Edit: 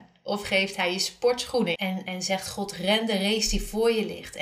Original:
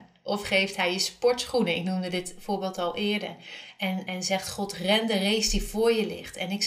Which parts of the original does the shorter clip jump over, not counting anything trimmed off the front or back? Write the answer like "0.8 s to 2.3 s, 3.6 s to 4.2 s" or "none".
1.7 s to 3.8 s